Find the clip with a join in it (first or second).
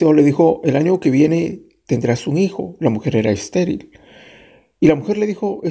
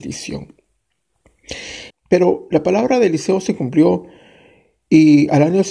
second